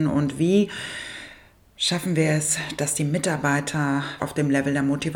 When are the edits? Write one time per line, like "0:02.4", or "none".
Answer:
0:04.2